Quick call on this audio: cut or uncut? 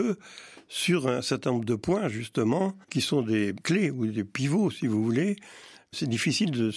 cut